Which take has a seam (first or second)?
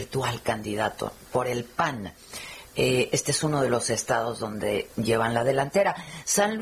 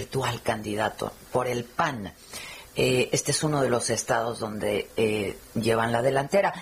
first